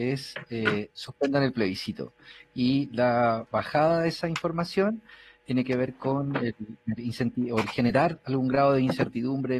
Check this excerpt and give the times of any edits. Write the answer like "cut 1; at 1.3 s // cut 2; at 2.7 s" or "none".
cut 1; at 7.0 s